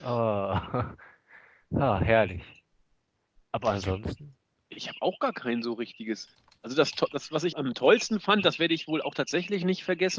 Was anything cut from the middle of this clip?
yes; 1 cut; at 7.5 s

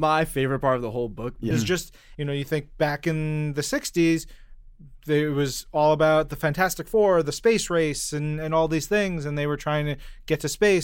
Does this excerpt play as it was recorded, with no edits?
no; 1 cut; at 1.5 s

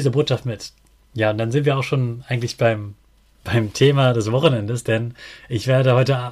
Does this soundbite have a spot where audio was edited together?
yes; 1 cut; at 1.0 s

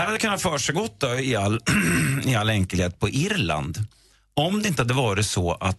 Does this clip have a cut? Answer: no; 0 cuts

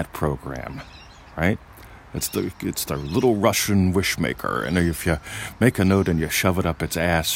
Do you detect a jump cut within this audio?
no; 0 cuts

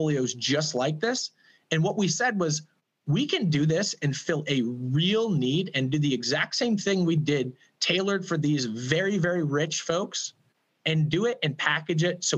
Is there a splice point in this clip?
no; 0 cuts

